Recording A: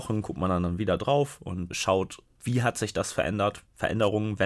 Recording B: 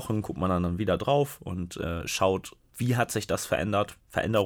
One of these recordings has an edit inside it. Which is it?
A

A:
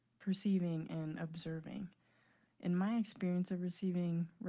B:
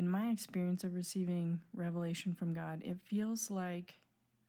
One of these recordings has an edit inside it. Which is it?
A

